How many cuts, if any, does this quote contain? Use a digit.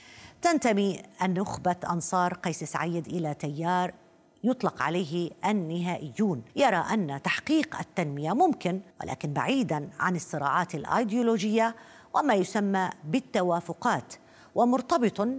2